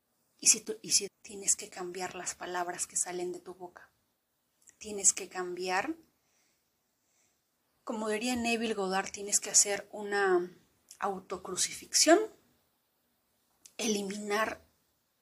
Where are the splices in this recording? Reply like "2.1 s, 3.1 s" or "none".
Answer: 1.1 s